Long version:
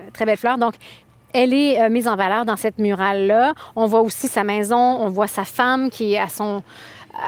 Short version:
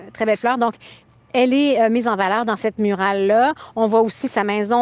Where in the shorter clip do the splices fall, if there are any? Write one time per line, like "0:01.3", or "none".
none